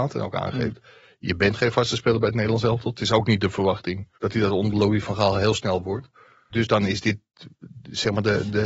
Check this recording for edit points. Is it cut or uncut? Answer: cut